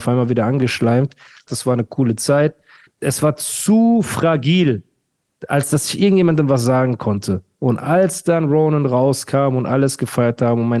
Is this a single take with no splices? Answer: no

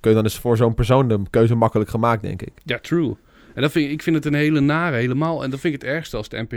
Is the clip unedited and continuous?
yes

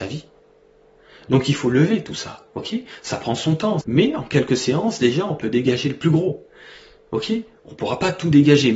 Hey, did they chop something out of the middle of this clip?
yes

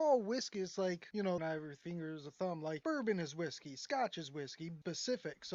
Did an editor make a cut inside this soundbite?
yes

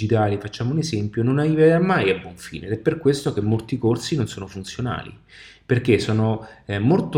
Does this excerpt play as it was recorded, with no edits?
yes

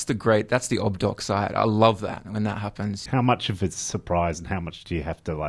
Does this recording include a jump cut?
yes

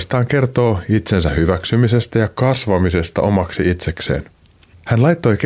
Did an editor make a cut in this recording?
no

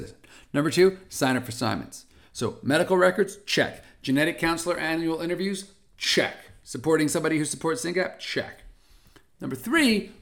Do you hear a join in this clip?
no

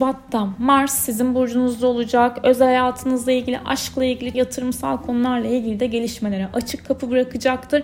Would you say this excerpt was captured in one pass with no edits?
no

